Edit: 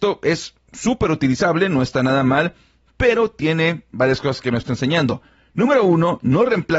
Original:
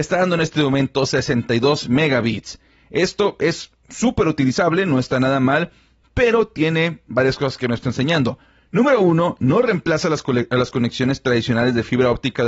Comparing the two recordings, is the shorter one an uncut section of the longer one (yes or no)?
yes